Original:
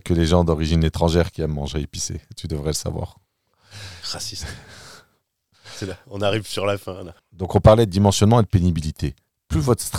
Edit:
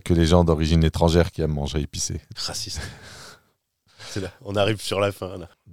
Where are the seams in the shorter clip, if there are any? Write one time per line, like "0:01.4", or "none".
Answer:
0:02.3

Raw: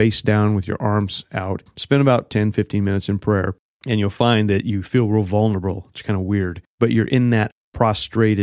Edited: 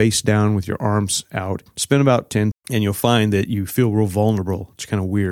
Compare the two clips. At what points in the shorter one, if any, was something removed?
0:02.5

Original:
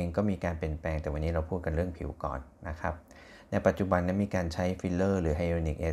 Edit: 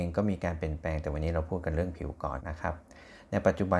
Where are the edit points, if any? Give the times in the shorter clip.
0:02.4

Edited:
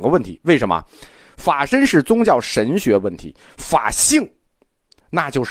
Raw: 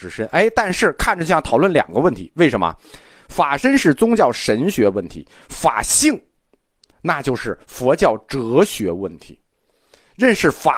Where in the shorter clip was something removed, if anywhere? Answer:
none

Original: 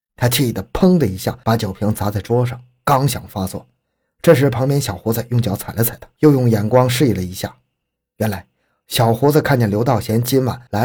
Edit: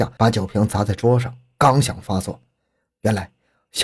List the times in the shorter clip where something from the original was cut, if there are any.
0:02.9

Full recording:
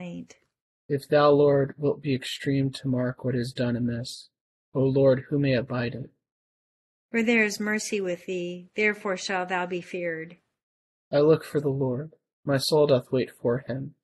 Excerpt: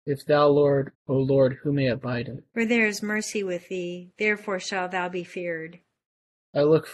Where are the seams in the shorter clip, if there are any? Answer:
0:00.9
0:02.5

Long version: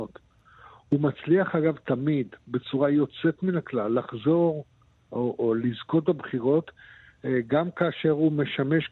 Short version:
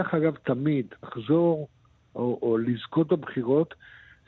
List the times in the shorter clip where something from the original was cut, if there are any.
0:01.0

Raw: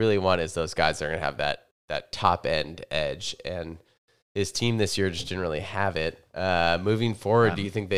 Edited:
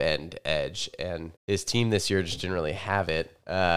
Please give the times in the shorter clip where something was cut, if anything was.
0:01.4

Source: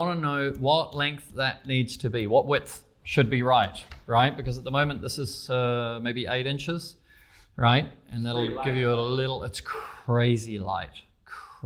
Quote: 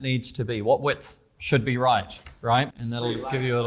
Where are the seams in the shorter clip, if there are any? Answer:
0:02.7

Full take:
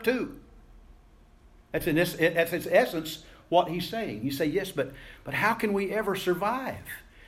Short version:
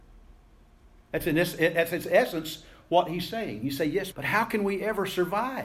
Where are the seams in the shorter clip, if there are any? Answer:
0:04.1

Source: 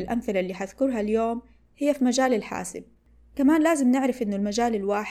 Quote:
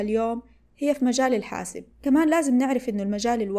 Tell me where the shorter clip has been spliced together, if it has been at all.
0:01.9

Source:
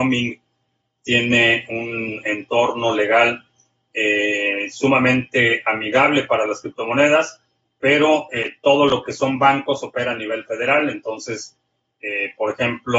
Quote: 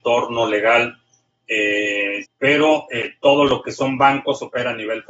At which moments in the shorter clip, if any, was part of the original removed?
0:02.2

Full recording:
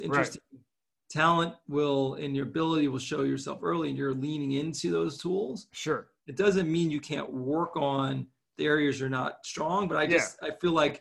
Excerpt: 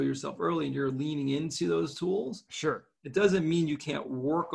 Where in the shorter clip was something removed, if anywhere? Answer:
none

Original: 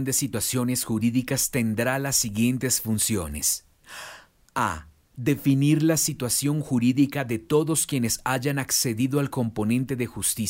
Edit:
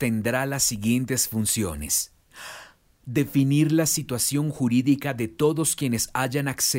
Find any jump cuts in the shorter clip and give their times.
0:02.9

